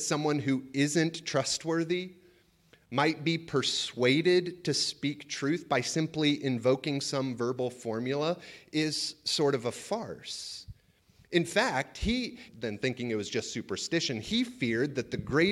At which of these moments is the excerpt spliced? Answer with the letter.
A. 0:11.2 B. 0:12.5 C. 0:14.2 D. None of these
B